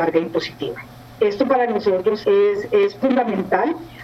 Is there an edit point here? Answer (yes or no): yes